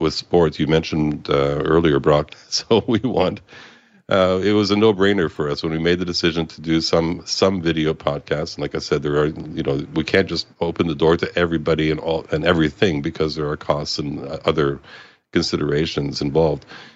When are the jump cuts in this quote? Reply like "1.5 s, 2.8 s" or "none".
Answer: 2.3 s, 10.5 s